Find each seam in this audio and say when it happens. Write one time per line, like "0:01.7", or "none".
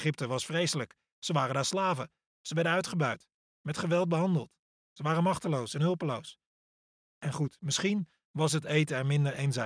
none